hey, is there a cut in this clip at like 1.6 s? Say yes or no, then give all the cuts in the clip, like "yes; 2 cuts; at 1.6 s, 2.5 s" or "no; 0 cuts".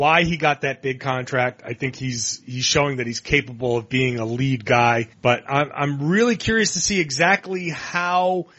no; 1 cut; at 5.1 s